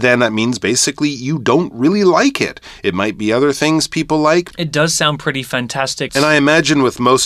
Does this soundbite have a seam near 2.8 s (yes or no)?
no